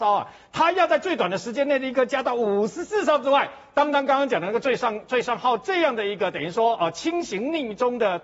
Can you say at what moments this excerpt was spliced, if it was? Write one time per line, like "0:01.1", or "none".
none